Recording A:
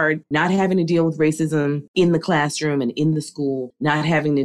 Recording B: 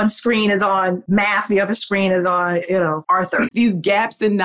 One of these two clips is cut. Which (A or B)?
B